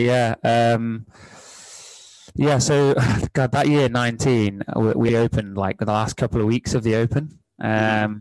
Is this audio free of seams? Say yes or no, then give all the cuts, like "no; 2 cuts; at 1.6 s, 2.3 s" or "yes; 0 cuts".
no; 1 cut; at 5.1 s